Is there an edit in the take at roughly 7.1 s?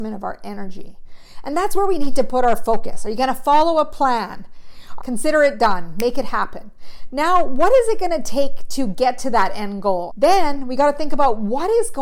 no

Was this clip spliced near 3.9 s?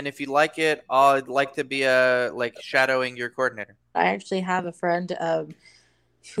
yes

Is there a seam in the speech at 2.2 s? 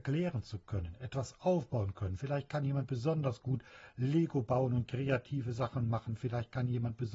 no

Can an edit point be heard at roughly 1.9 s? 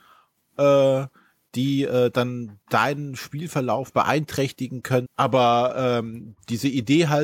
no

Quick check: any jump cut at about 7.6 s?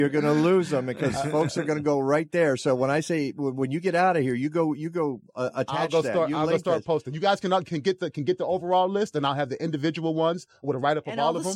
yes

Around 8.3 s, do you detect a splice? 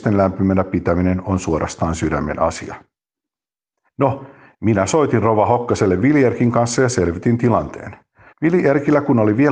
yes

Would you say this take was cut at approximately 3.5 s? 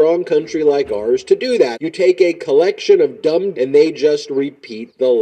yes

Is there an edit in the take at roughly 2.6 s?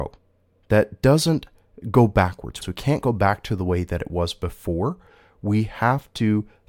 yes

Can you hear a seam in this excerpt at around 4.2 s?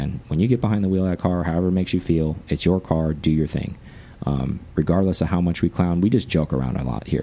no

